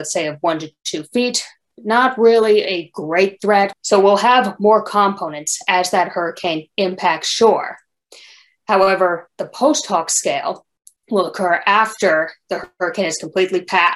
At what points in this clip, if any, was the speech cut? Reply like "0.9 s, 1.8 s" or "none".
3.7 s